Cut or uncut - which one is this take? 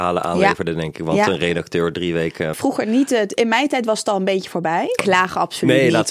cut